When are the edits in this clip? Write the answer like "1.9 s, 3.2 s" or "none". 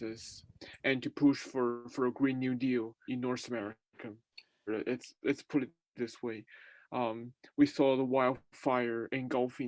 3.1 s, 4.7 s